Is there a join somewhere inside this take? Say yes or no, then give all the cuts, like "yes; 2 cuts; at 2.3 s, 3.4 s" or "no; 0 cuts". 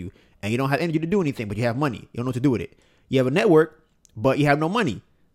no; 0 cuts